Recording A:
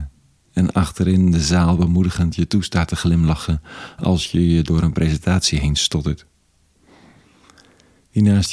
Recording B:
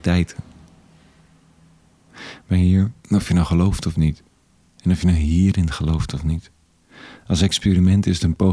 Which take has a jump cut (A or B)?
B